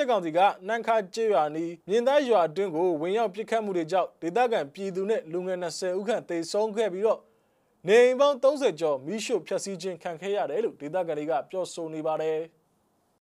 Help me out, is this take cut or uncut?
cut